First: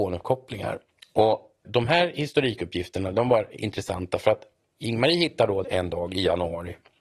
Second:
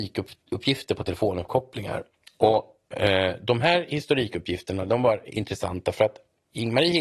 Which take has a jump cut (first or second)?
first